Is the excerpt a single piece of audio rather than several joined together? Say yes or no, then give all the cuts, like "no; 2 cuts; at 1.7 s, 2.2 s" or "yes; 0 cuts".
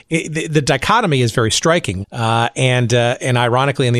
no; 1 cut; at 2.0 s